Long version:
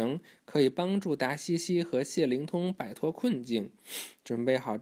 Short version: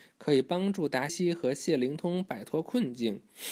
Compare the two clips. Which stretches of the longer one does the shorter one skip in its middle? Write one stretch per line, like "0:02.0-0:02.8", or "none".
0:01.4-0:01.6